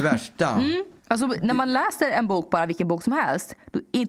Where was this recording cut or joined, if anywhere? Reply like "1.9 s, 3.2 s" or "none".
1.0 s